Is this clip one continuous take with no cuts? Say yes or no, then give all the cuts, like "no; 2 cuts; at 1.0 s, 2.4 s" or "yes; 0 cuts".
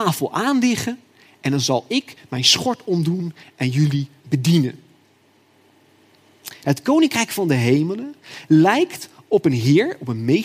no; 1 cut; at 6.6 s